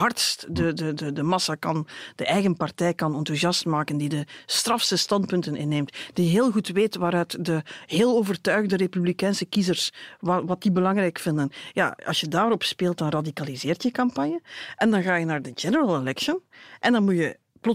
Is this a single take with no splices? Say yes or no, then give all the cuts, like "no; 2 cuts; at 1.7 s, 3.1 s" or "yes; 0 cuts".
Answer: yes; 0 cuts